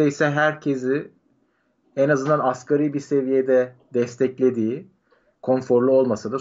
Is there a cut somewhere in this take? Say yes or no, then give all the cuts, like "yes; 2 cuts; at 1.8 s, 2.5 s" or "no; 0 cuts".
no; 0 cuts